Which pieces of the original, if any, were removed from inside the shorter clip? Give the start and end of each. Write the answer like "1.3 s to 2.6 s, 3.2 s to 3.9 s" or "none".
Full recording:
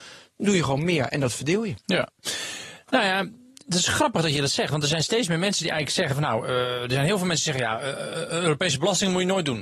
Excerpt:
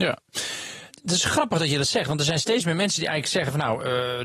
2.8 s to 3.5 s